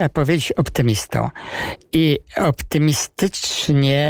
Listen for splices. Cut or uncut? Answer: uncut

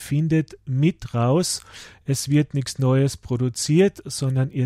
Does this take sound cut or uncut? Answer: uncut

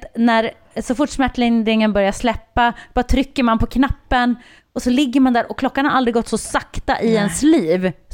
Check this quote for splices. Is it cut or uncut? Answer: uncut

